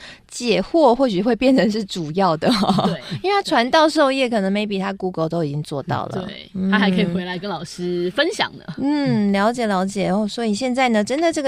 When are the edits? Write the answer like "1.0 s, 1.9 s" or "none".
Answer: none